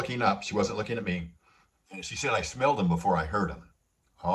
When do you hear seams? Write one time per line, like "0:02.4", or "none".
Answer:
0:01.8